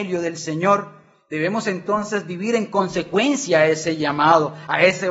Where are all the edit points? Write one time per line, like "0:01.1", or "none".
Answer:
none

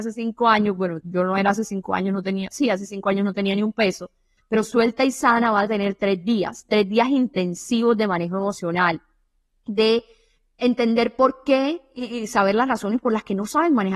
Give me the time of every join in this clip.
0:04.4

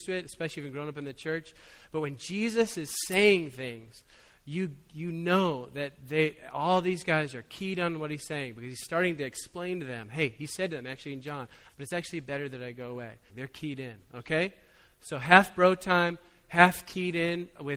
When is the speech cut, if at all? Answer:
0:11.7
0:13.3

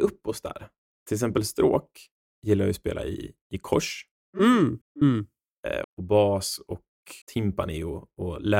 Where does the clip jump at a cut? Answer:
0:04.8
0:05.8
0:07.2

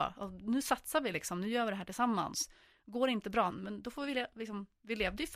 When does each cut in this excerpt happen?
0:03.5

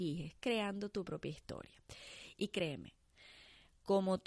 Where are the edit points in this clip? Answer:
0:02.3

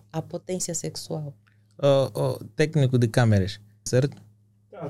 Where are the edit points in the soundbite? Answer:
0:03.9

